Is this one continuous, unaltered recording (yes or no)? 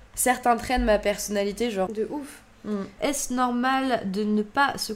no